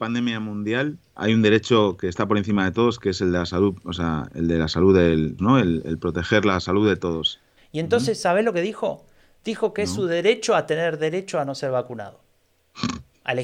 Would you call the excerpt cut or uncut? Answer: cut